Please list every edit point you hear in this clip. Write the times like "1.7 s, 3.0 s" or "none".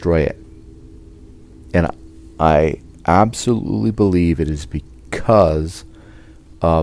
none